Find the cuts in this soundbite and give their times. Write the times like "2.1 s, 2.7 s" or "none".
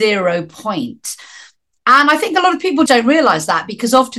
2.9 s